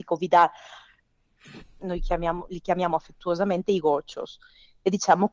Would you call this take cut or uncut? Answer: cut